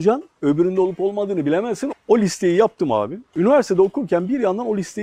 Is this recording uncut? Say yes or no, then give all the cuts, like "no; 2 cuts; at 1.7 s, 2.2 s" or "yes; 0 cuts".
no; 1 cut; at 1.9 s